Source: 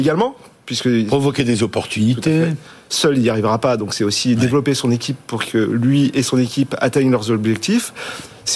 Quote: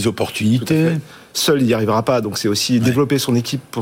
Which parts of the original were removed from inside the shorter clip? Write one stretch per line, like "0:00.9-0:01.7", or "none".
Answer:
none